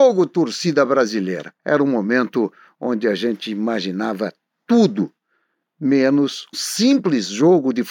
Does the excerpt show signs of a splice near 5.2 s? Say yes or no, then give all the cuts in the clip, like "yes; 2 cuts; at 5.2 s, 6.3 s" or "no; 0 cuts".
no; 2 cuts; at 1.6 s, 6.5 s